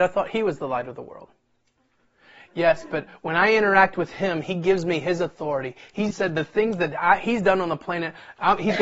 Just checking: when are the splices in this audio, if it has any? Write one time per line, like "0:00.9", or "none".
0:06.1